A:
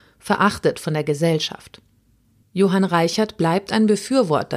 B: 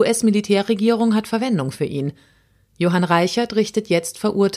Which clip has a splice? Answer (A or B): A